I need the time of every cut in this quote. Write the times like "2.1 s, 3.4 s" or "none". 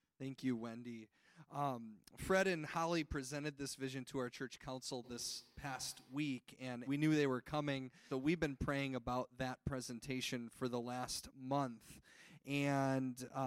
6.9 s, 8.1 s